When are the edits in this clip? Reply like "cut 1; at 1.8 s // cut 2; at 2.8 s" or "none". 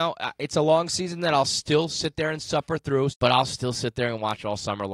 cut 1; at 3.1 s